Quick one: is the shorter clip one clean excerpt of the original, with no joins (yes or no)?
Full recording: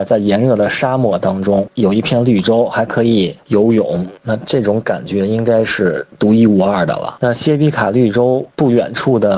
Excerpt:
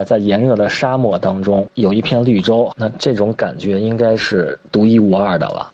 no